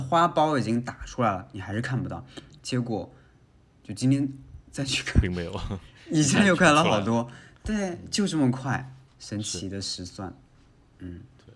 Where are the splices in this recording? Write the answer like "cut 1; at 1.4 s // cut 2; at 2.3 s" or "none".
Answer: cut 1; at 2.6 s // cut 2; at 9.1 s